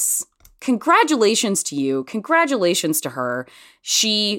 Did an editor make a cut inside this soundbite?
no; 0 cuts

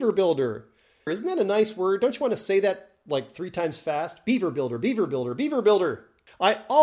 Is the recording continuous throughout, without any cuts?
no; 1 cut; at 1.1 s

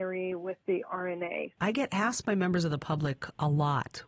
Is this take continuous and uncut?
no; 1 cut; at 1.6 s

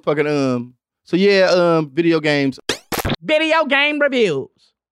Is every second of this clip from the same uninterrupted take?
yes; 0 cuts

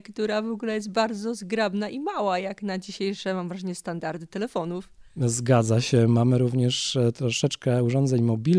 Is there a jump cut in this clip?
no; 0 cuts

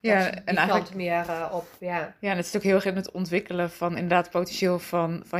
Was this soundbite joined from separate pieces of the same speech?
no; 0 cuts

